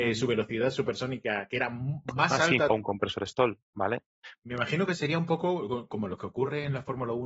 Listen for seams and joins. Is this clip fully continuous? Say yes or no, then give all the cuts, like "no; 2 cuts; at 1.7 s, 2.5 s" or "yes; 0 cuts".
no; 2 cuts; at 2.7 s, 4.4 s